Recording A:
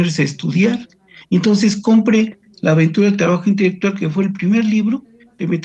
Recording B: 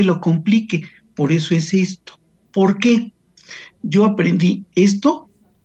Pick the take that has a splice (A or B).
B